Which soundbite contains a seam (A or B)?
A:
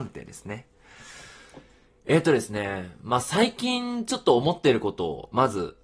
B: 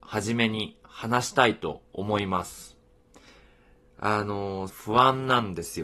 B